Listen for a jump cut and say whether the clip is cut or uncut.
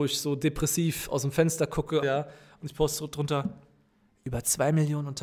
cut